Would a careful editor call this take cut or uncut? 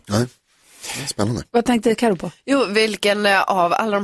uncut